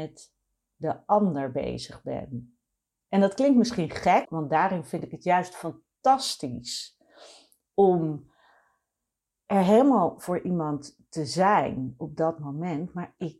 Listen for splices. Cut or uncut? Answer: cut